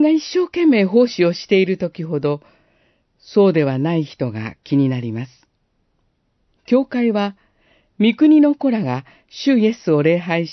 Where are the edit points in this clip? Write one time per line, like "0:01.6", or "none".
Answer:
0:06.5